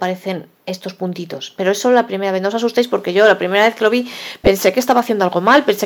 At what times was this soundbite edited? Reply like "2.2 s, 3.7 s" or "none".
none